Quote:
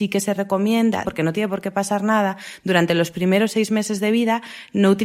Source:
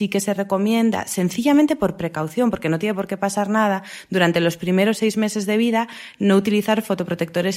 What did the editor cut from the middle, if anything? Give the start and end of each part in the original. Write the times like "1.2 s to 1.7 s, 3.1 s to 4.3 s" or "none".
1.0 s to 2.5 s